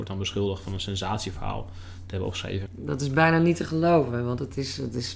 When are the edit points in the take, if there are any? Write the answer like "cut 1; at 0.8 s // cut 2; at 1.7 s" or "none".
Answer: cut 1; at 2.7 s